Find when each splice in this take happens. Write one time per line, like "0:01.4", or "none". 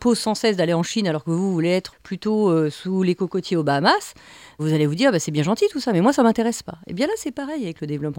0:01.9